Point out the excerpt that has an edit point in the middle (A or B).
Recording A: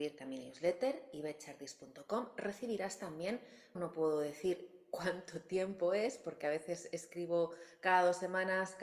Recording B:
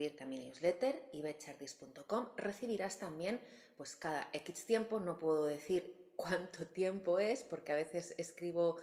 A